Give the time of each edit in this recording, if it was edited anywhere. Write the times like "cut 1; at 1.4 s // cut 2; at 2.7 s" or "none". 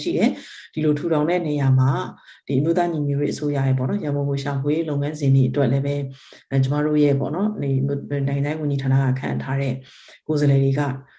none